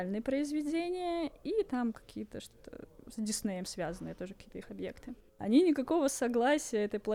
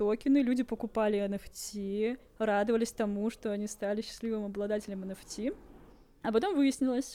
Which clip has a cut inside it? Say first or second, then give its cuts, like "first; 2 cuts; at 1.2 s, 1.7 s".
first; 1 cut; at 5.3 s